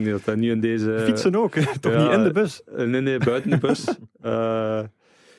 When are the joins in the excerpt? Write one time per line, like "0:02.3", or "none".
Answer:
none